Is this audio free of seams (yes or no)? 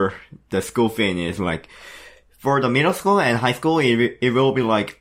yes